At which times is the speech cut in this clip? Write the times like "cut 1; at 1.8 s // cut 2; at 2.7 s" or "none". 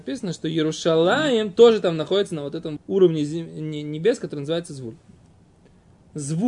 cut 1; at 2.8 s